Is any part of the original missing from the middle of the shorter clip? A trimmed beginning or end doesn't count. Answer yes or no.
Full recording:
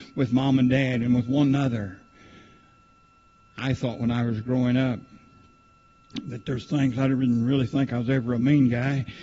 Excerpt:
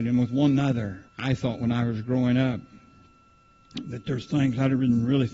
yes